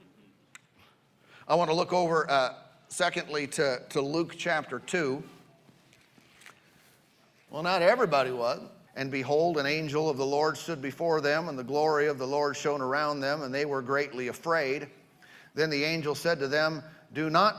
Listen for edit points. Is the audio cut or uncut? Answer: cut